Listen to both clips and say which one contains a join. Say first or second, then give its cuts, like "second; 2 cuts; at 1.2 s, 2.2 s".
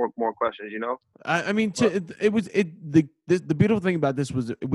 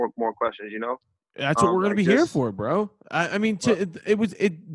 first; 1 cut; at 1.1 s